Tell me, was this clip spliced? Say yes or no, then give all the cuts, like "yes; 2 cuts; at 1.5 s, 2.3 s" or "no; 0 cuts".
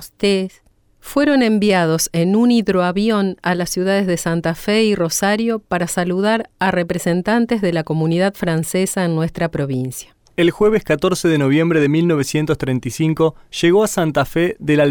no; 0 cuts